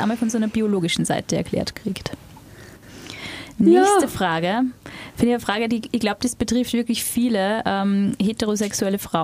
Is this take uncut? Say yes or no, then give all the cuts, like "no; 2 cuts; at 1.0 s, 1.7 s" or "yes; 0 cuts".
yes; 0 cuts